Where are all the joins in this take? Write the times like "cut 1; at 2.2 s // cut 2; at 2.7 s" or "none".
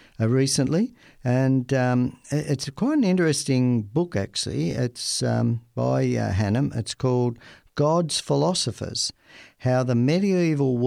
none